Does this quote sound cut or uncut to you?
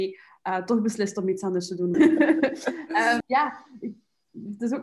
cut